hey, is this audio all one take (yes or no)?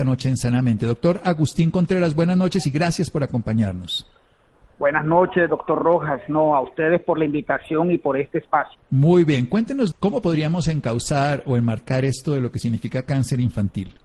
no